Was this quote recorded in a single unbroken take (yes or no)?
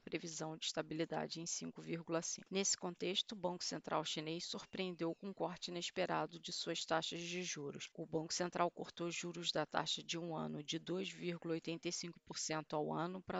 yes